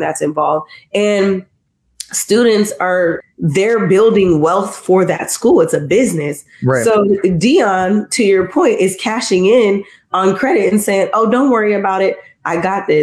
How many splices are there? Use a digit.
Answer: 1